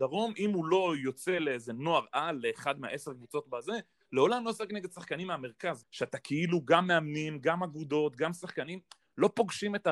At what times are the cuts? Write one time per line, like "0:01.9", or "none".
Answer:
0:05.8